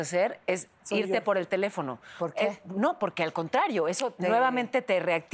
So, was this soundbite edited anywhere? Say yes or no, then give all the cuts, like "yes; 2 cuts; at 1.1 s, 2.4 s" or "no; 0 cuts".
yes; 1 cut; at 4.2 s